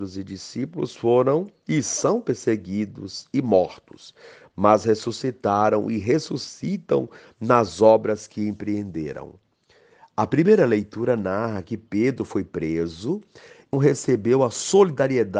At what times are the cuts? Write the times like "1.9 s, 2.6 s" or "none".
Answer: 13.7 s